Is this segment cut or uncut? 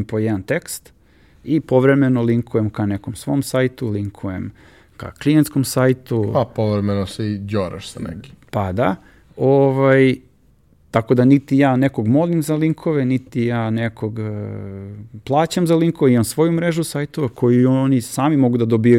uncut